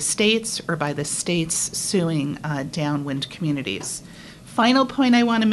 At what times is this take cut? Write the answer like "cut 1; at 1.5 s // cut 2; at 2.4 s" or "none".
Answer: none